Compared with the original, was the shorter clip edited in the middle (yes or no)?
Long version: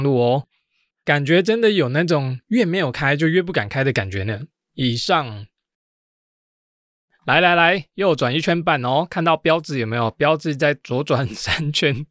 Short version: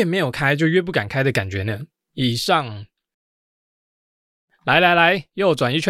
no